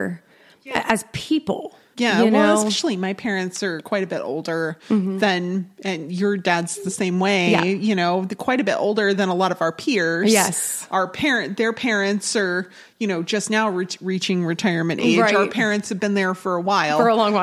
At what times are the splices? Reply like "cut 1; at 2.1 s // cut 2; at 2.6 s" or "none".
none